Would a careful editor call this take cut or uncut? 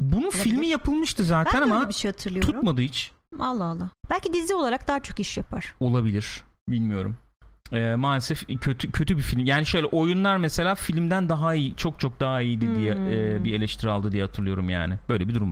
cut